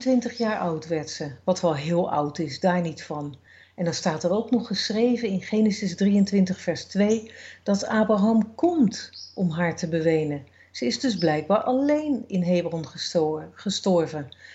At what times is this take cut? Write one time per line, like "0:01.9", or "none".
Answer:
none